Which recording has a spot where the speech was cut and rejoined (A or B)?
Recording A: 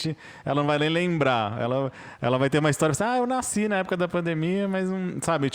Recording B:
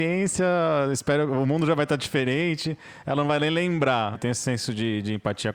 B